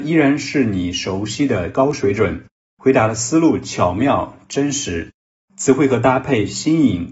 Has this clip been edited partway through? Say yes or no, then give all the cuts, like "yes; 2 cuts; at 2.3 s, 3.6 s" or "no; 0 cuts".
no; 0 cuts